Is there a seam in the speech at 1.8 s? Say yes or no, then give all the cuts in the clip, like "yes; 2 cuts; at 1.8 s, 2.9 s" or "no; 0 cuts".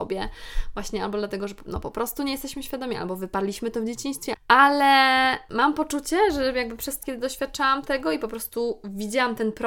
no; 2 cuts; at 4.4 s, 7.0 s